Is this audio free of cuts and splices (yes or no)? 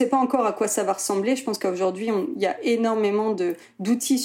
yes